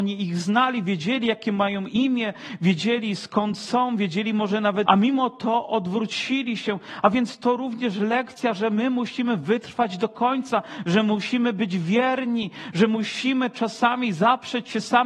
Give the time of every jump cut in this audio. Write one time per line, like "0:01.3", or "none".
0:04.8

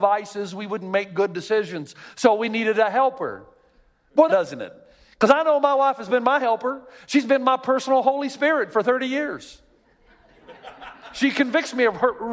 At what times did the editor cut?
0:04.3

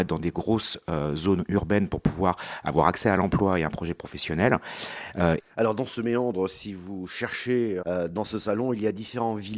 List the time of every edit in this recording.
0:05.4
0:07.8

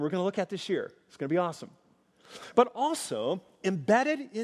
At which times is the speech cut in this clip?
none

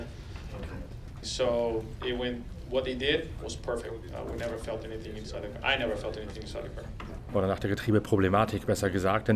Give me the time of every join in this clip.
0:01.2
0:07.3

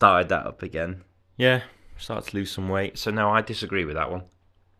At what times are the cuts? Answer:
0:01.2
0:02.9

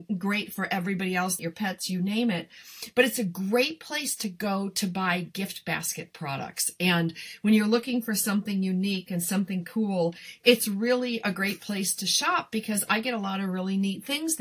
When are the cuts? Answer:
0:01.4

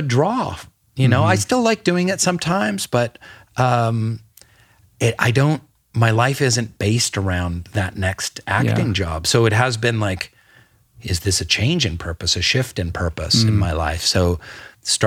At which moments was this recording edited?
none

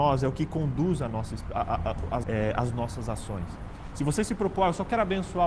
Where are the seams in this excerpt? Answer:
0:02.2

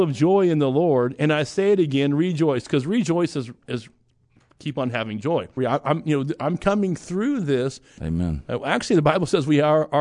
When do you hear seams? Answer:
0:05.6
0:08.0

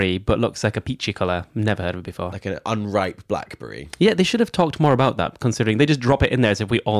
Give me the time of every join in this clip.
none

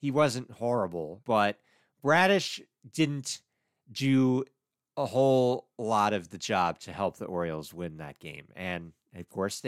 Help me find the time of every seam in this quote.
0:01.2

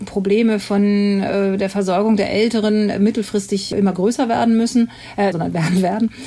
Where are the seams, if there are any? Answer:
0:05.3

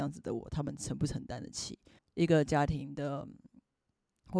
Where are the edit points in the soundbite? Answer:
0:02.0

